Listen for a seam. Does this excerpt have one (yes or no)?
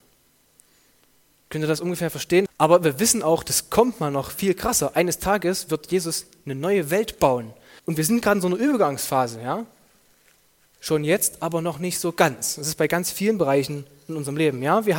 yes